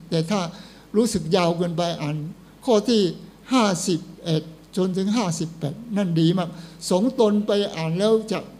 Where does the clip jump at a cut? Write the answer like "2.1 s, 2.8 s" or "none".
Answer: none